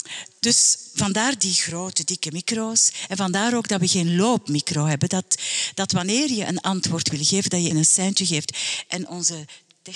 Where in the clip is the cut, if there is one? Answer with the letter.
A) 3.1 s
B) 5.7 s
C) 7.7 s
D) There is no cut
C